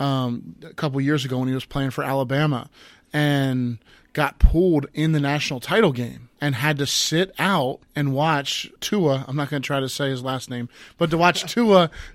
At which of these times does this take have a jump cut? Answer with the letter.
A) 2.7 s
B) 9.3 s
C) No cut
C